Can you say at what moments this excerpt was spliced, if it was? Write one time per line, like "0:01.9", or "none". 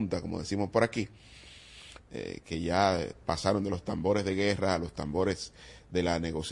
0:02.0